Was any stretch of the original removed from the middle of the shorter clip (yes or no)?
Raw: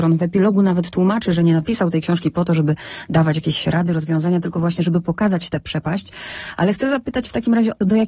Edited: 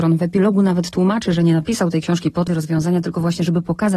yes